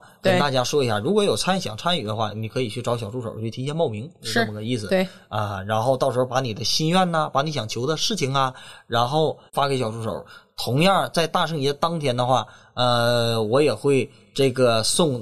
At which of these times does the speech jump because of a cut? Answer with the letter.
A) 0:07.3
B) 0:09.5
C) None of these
B